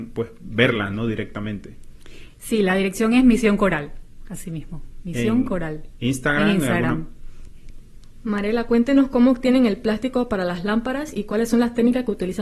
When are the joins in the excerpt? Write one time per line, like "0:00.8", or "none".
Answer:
none